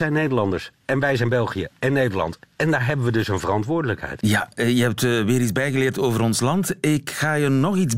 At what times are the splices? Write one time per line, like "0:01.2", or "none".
none